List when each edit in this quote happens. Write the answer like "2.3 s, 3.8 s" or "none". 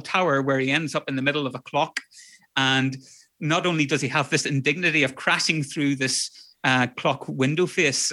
none